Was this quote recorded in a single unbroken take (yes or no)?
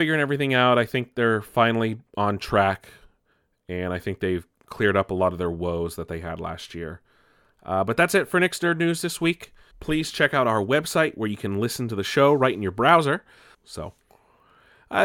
no